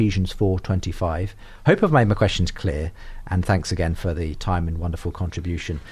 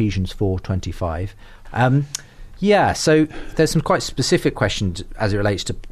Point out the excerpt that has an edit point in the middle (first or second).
second